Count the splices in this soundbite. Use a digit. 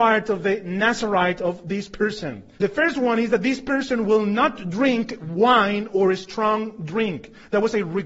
1